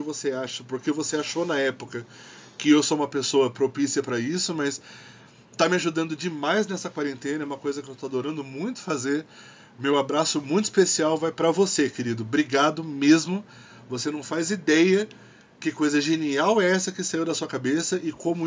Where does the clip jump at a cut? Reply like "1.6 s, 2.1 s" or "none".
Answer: none